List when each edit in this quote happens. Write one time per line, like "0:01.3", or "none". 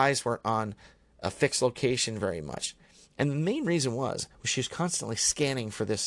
none